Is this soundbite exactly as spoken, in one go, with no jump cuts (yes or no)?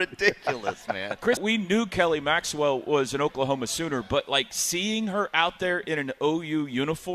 no